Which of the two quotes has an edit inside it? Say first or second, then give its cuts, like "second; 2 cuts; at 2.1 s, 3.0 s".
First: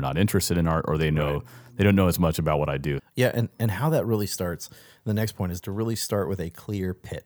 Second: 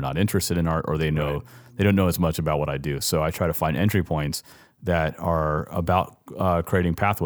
first; 1 cut; at 3.0 s